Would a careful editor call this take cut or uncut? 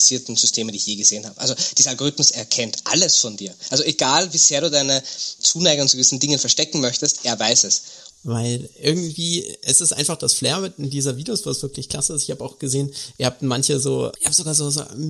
cut